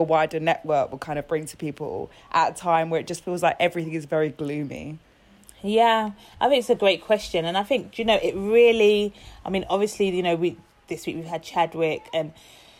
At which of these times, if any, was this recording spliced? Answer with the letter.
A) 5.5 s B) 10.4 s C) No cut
C